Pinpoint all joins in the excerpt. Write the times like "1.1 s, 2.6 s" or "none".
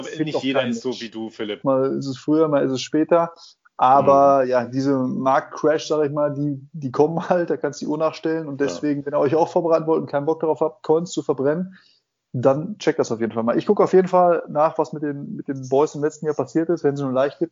1.6 s